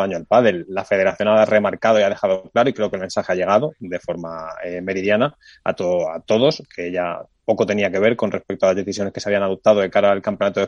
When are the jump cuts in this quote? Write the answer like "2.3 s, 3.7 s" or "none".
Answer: none